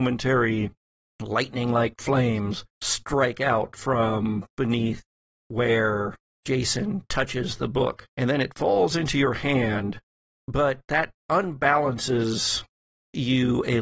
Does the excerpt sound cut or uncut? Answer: cut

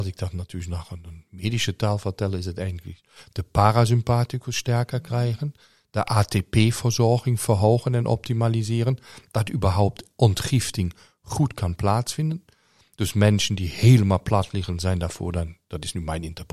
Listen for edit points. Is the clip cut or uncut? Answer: uncut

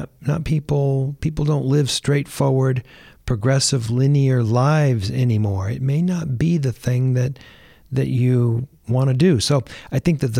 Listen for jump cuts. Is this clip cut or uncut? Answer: uncut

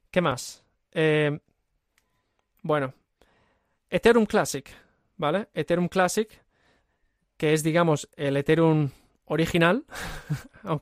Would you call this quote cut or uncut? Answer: uncut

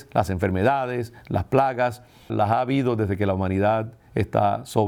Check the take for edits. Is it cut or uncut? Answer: cut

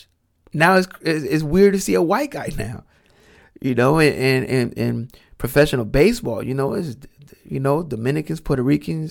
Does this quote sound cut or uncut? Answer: uncut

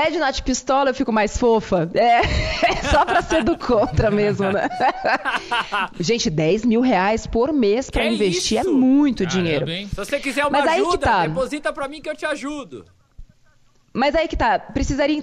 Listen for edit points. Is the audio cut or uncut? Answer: uncut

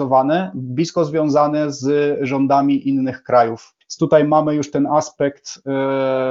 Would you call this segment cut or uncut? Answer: cut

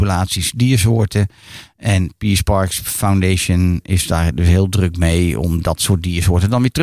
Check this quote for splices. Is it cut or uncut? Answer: uncut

